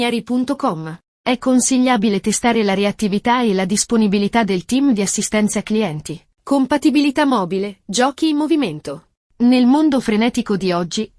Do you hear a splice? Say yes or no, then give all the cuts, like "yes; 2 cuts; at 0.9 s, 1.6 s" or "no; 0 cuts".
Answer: yes; 1 cut; at 6.3 s